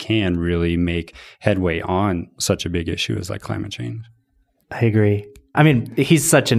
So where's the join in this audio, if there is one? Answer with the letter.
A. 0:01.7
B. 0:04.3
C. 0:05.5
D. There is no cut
C